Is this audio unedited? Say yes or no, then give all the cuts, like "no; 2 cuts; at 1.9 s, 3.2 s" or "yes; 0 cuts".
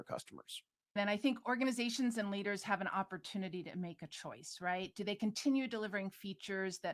no; 1 cut; at 1.0 s